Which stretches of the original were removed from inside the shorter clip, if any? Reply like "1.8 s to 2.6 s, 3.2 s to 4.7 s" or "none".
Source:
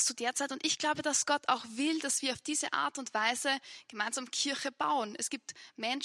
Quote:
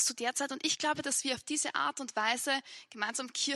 1.0 s to 2.0 s